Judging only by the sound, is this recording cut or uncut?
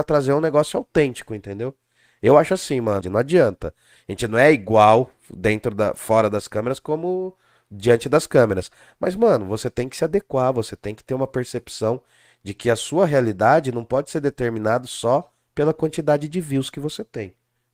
cut